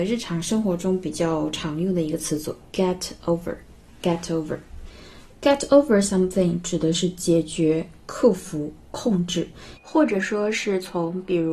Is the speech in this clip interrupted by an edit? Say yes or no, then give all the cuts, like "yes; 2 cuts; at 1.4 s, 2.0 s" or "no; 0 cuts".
yes; 1 cut; at 9.8 s